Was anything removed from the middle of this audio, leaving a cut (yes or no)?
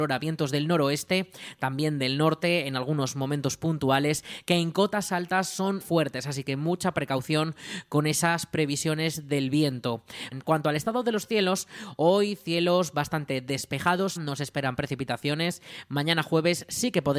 yes